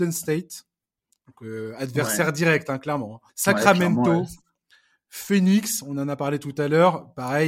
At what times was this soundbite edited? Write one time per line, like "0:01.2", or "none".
0:03.3